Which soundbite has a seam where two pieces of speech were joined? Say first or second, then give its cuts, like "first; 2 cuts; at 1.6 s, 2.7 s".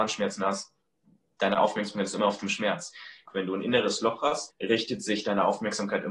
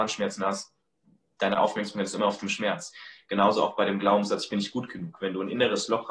first; 2 cuts; at 3.3 s, 4.5 s